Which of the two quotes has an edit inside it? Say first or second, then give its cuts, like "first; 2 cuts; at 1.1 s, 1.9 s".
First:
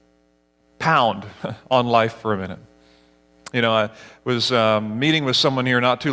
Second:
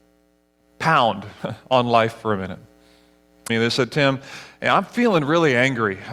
second; 1 cut; at 3.5 s